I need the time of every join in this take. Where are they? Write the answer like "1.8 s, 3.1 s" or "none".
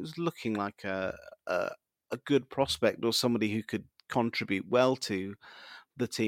none